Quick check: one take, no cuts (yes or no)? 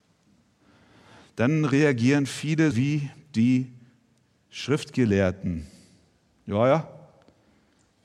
no